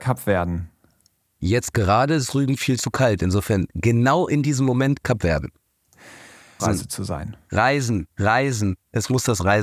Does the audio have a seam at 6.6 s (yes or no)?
yes